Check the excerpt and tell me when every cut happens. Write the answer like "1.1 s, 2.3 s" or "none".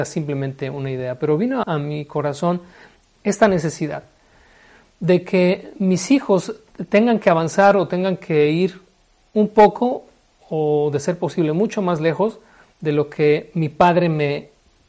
1.6 s